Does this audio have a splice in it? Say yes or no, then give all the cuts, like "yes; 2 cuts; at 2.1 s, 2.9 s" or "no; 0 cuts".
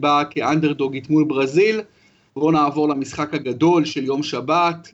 yes; 1 cut; at 2.3 s